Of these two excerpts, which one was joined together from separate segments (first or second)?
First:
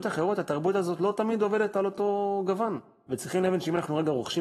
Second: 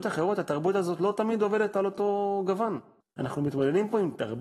second